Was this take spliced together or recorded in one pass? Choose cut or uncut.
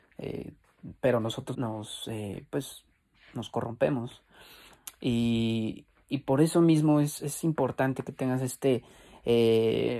cut